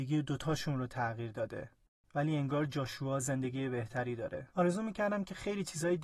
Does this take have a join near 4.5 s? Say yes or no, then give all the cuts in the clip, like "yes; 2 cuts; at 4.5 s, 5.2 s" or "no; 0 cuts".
yes; 1 cut; at 4.5 s